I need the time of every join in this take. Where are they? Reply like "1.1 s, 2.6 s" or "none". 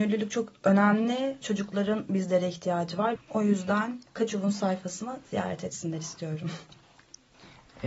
1.4 s, 3.2 s